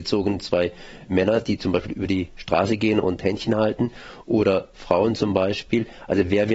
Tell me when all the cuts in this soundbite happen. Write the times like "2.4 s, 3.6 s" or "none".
none